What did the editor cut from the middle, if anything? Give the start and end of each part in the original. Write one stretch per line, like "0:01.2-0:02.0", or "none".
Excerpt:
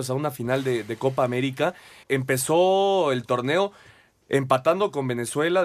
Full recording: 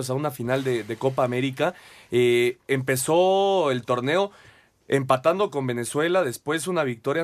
0:02.0-0:02.6